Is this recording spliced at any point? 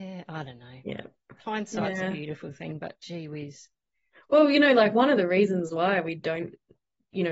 no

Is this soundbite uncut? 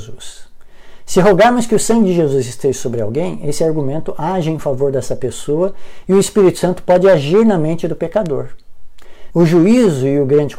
no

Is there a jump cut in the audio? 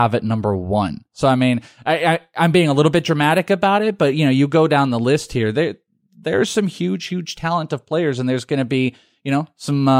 no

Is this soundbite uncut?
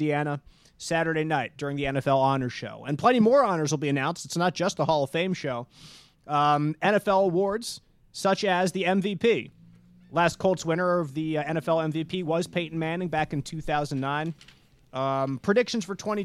yes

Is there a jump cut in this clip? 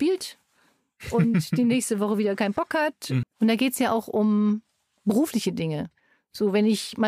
yes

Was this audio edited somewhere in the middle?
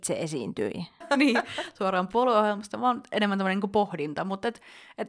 yes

